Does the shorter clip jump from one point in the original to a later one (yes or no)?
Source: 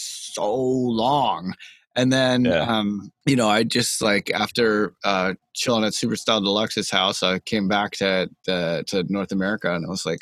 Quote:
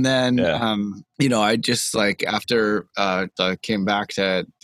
yes